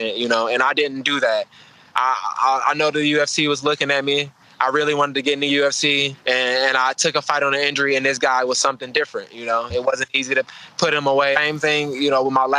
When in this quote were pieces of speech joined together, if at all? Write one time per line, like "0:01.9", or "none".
0:06.1
0:09.7
0:11.3